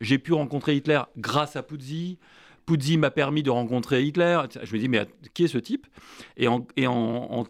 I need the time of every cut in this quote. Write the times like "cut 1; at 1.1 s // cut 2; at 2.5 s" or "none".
none